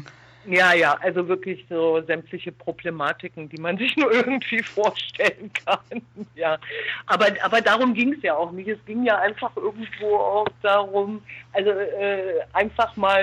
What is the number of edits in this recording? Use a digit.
0